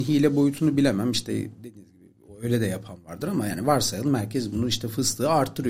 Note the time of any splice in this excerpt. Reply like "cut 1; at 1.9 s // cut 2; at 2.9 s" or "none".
none